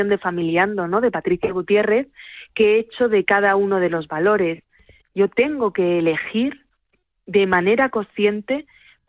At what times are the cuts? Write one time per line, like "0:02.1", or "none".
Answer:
0:05.0